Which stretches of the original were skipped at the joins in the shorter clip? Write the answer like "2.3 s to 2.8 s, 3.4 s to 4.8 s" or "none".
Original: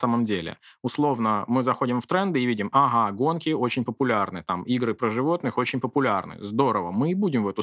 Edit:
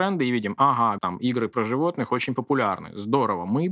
3.1 s to 4.4 s